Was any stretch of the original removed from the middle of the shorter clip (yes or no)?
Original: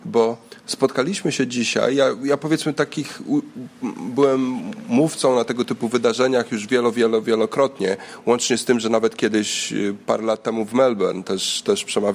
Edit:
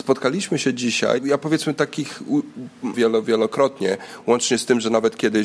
yes